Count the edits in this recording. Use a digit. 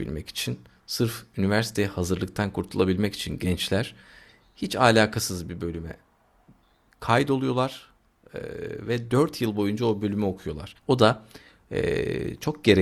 1